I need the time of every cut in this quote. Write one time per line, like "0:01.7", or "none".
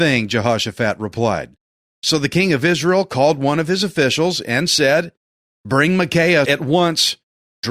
0:06.4